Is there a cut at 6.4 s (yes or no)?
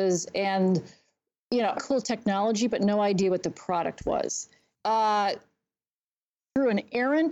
no